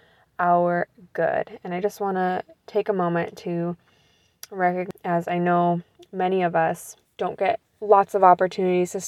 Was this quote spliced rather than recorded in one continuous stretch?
no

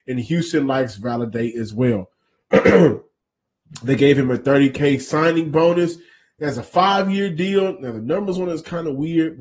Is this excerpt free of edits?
yes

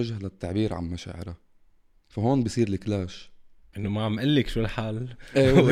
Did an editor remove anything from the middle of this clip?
yes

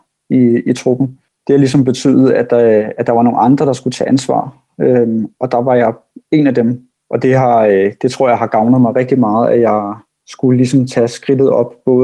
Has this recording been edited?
no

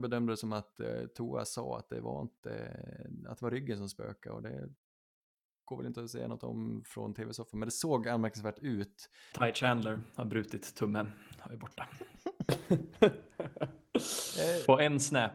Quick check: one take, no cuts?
no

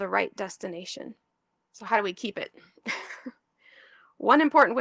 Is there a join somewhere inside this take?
yes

